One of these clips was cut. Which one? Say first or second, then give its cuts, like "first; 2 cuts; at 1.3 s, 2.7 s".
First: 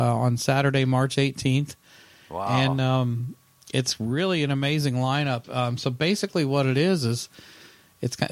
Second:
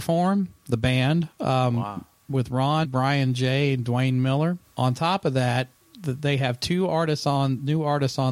second; 2 cuts; at 2.8 s, 4.6 s